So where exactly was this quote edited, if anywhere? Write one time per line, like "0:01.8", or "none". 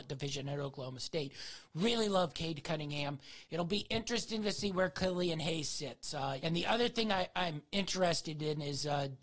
0:06.4